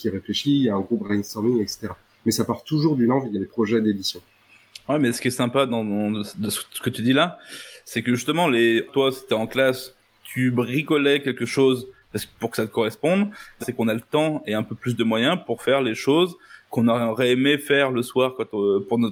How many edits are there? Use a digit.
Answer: 2